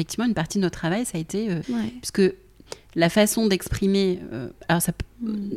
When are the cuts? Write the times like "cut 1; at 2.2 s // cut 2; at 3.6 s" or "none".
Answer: cut 1; at 1.6 s